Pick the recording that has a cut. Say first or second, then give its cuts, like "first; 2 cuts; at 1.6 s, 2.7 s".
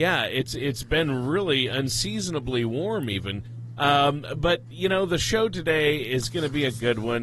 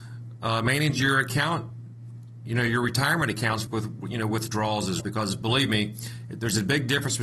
second; 2 cuts; at 3.7 s, 5.0 s